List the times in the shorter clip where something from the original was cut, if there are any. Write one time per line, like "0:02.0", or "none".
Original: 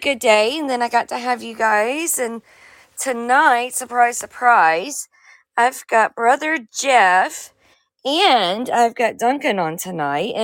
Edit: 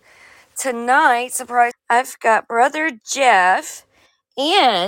0:01.7